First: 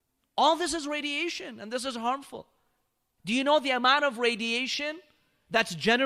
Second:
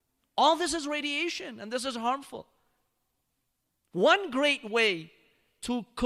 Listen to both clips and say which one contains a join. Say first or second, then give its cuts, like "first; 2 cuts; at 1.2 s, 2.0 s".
first; 1 cut; at 3.2 s